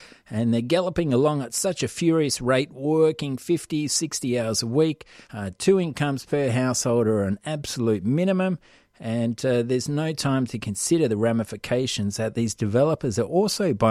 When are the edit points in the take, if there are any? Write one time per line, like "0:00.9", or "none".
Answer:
none